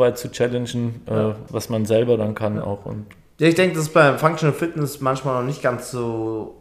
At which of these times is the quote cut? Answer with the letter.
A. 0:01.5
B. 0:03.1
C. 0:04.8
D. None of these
A